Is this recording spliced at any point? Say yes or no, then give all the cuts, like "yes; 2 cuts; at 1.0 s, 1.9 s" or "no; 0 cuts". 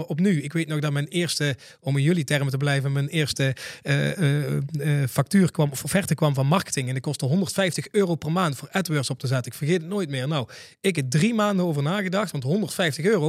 no; 0 cuts